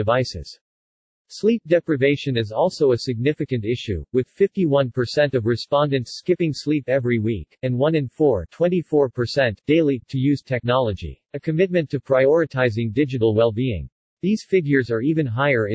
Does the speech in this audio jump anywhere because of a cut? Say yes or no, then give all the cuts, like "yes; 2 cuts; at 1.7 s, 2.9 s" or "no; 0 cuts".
yes; 2 cuts; at 11.2 s, 14.1 s